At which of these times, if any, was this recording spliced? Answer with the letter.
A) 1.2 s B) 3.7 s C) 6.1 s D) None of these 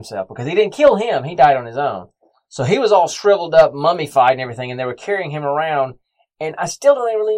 D